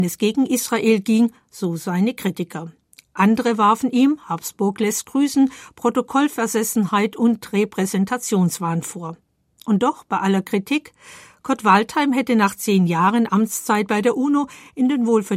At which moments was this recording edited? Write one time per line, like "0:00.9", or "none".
none